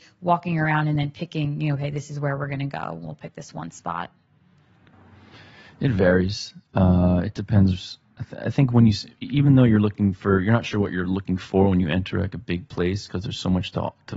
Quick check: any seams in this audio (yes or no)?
no